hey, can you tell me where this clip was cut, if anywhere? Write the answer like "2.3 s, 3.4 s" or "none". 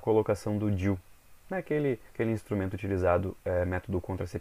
2.1 s